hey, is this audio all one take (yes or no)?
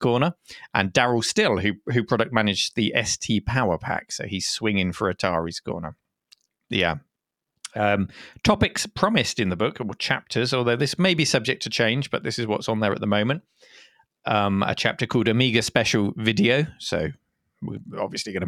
yes